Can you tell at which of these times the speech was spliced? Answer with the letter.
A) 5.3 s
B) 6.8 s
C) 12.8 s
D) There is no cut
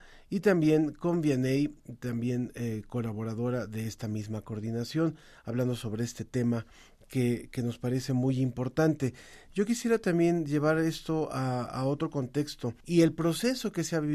C